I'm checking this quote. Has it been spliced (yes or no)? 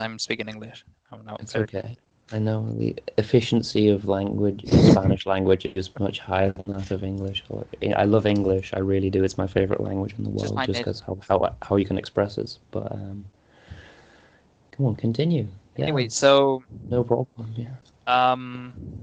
no